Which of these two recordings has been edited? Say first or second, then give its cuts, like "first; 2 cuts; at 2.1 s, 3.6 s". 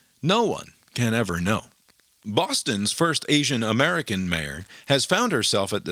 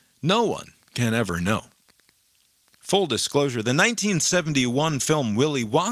first; 1 cut; at 2.1 s